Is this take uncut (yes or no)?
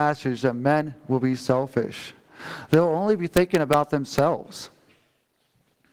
yes